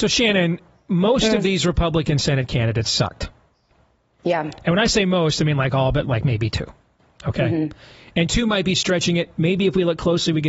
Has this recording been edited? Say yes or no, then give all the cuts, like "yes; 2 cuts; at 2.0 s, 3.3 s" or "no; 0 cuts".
no; 0 cuts